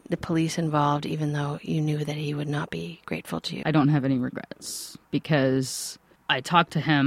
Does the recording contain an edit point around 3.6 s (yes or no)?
yes